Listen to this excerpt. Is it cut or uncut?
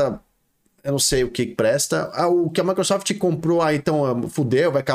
uncut